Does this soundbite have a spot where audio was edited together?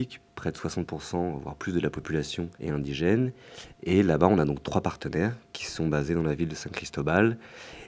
yes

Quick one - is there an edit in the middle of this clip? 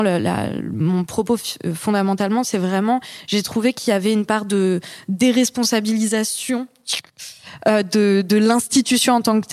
no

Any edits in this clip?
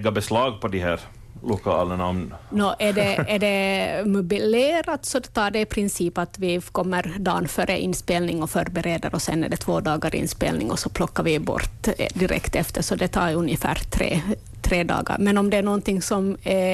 no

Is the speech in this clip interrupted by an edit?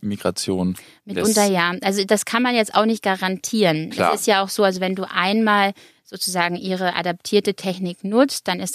no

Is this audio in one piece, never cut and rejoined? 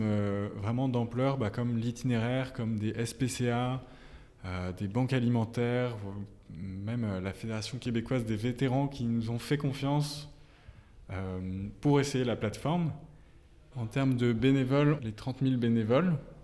no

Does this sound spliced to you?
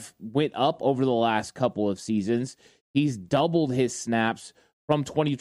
no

